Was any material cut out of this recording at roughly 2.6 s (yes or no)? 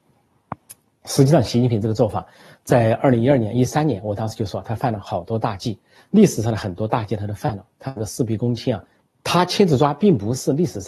no